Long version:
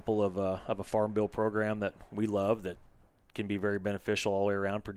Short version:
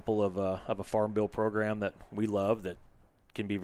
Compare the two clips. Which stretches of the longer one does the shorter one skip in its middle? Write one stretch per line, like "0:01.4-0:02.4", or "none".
none